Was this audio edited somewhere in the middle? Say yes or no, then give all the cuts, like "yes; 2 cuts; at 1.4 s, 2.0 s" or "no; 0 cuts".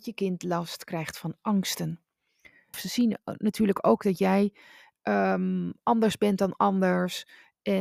yes; 1 cut; at 2.7 s